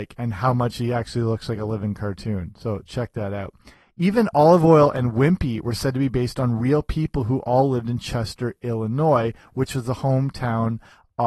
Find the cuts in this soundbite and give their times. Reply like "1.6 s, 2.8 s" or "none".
none